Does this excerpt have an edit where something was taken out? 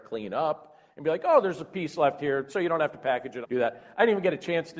yes; 1 cut; at 3.4 s

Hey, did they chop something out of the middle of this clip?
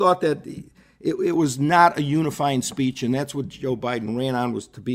no; 0 cuts

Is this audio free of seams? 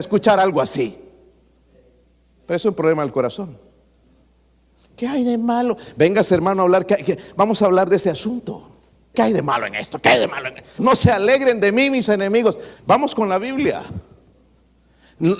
no; 3 cuts; at 9.1 s, 10.8 s, 12.7 s

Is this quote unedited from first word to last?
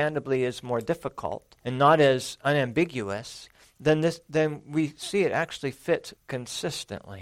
no; 2 cuts; at 1.6 s, 6.2 s

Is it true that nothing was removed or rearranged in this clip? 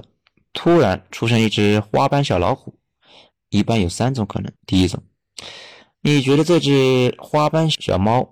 no; 2 cuts; at 3.3 s, 4.6 s

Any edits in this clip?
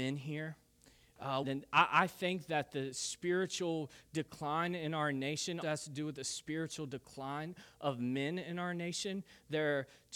yes; 2 cuts; at 1.4 s, 5.6 s

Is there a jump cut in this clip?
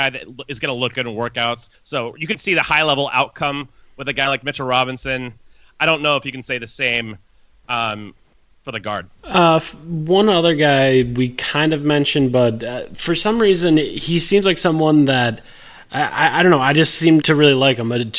yes; 2 cuts; at 1.7 s, 17.2 s

